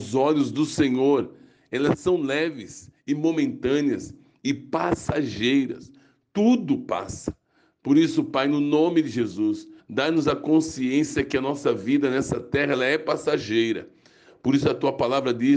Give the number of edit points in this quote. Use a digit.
1